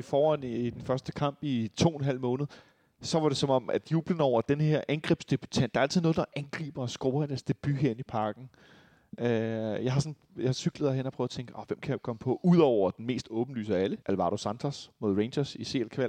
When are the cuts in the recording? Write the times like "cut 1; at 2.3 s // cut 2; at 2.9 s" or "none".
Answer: cut 1; at 14.0 s